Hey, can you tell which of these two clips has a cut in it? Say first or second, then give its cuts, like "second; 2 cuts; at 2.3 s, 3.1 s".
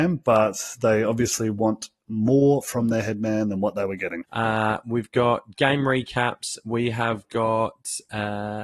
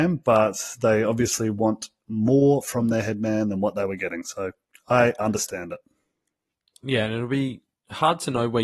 first; 1 cut; at 4.2 s